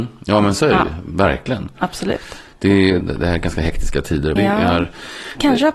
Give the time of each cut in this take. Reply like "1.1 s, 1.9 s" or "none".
3.0 s, 4.4 s